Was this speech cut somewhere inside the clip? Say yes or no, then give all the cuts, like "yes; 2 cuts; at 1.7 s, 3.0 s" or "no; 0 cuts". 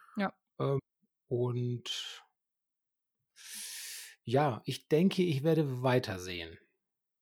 no; 0 cuts